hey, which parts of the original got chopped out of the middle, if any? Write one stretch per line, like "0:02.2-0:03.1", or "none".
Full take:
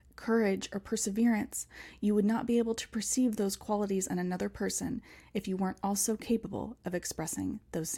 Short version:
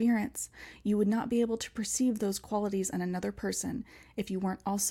none